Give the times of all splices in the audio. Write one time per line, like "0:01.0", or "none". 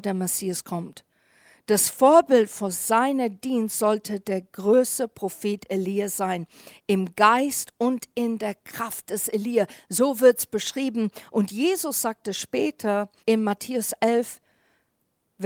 0:13.2